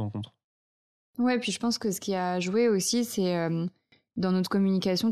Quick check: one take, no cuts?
yes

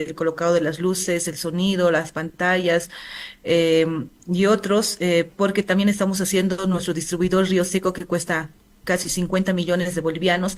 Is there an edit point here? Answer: no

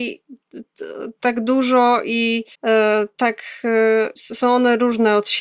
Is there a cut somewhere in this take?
yes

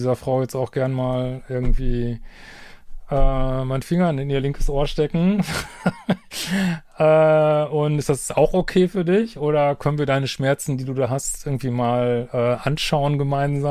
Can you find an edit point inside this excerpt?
no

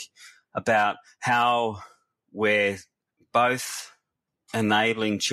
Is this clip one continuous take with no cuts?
yes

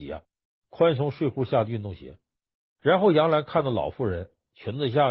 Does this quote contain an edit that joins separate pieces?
no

